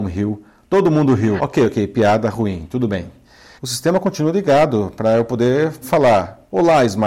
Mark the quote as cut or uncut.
cut